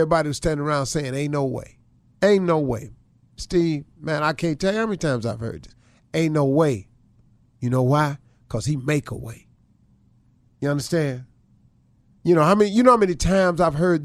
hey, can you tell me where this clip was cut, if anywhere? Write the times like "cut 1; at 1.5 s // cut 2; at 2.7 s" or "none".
cut 1; at 7.4 s